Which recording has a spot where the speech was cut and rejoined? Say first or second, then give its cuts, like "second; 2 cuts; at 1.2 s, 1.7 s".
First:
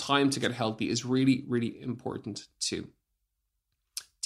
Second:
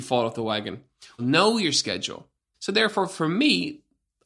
second; 2 cuts; at 1.2 s, 2.5 s